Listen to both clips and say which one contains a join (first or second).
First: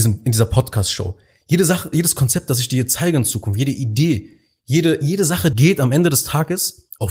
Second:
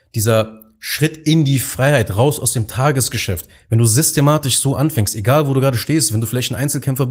first